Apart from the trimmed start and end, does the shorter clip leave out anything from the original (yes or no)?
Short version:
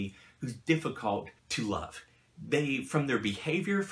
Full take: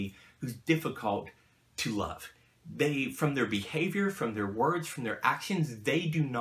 yes